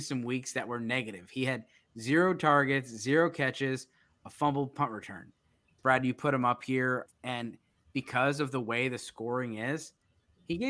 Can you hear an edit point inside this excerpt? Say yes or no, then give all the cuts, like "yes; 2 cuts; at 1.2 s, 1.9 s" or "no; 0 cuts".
yes; 2 cuts; at 5.8 s, 7.1 s